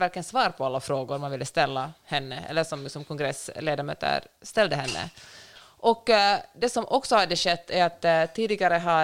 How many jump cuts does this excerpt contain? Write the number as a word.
zero